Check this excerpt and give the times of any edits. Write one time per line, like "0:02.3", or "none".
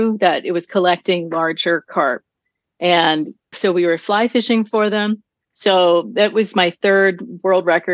0:03.5
0:05.5